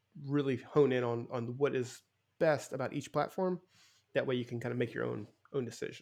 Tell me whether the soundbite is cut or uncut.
uncut